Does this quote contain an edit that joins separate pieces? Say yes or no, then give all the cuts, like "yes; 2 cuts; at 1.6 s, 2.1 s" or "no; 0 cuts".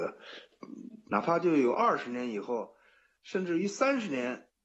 yes; 1 cut; at 1.1 s